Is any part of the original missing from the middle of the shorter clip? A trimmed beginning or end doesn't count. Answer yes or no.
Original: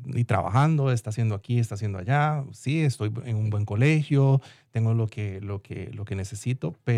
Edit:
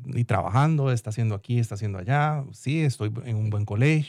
no